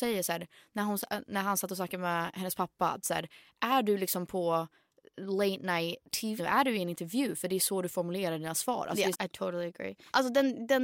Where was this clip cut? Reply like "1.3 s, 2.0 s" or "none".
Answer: 6.4 s, 9.1 s

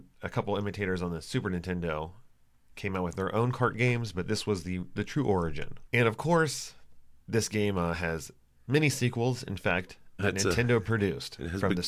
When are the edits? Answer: 5.9 s, 10.2 s

